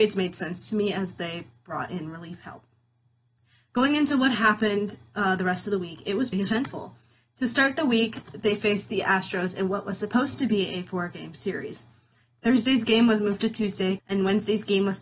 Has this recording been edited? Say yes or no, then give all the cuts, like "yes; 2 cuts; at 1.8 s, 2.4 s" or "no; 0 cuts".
yes; 2 cuts; at 6.3 s, 14.0 s